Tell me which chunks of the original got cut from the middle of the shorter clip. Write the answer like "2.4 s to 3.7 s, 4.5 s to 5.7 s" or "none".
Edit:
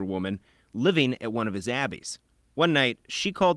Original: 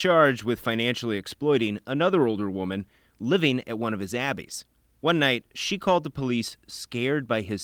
none